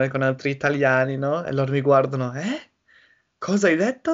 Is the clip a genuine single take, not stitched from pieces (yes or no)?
yes